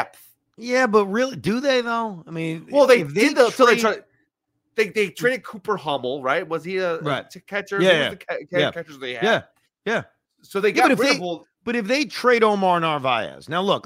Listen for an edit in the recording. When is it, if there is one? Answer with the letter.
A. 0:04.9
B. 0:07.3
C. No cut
C